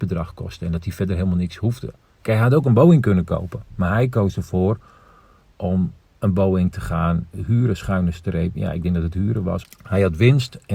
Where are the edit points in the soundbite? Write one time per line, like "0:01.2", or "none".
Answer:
0:09.6